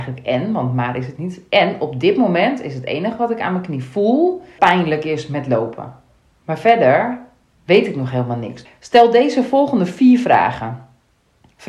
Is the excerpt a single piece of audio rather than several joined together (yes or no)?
no